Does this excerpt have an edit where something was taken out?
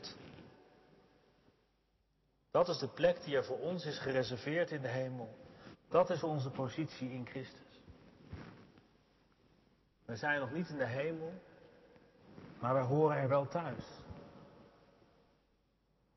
yes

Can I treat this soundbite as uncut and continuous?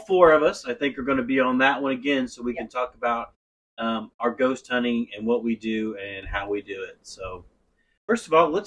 yes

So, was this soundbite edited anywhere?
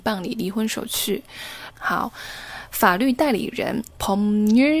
yes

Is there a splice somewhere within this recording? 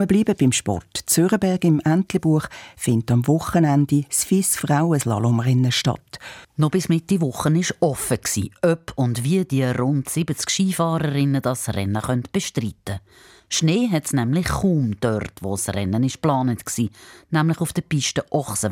yes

